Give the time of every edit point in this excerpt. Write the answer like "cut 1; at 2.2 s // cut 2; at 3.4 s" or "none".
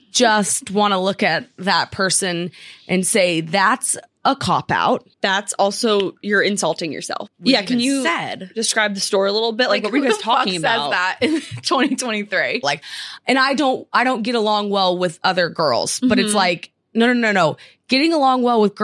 cut 1; at 5.1 s // cut 2; at 7.3 s // cut 3; at 12.6 s